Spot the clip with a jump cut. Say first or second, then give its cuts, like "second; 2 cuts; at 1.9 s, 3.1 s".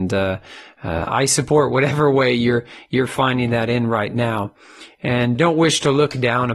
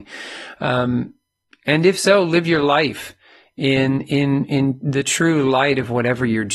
first; 1 cut; at 5.4 s